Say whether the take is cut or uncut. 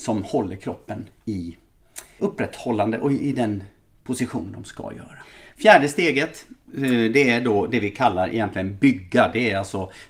cut